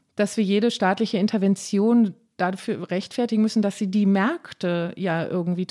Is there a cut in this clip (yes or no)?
no